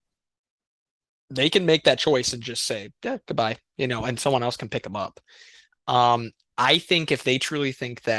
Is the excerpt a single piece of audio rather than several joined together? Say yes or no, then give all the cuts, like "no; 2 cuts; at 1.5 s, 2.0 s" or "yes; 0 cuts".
yes; 0 cuts